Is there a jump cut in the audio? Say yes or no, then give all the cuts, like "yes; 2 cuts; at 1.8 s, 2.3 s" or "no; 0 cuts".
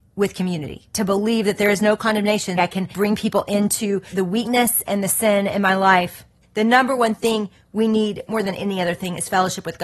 yes; 2 cuts; at 2.6 s, 6.4 s